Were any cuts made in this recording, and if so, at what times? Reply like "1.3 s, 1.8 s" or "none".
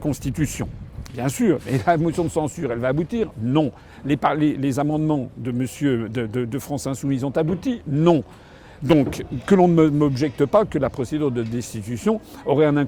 1.1 s

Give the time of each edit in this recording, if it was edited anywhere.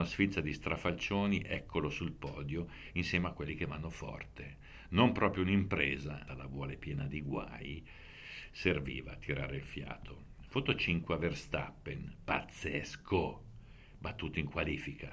6.3 s

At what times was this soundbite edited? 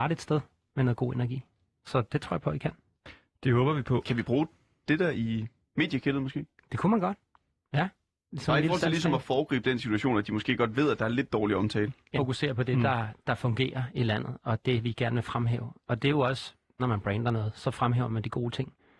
12.2 s, 16.8 s

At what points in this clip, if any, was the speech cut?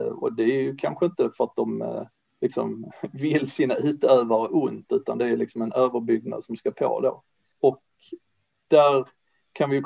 none

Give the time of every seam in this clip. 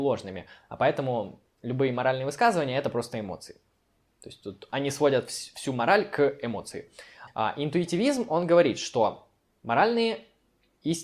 7.3 s

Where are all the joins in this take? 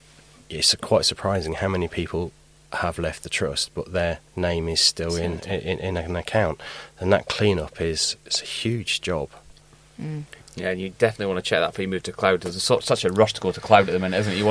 4.3 s, 10.4 s

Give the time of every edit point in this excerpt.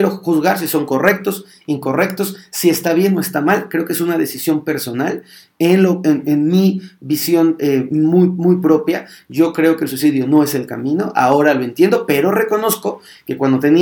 none

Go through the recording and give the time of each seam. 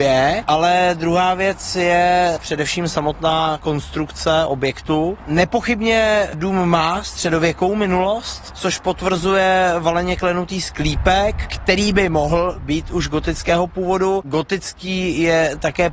2.4 s

